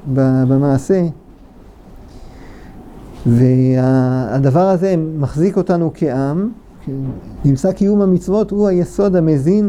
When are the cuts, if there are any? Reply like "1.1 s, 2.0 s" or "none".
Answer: 7.4 s